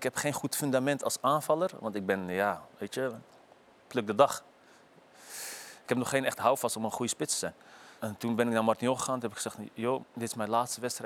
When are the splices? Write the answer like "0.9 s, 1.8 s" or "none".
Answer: 8.0 s, 10.0 s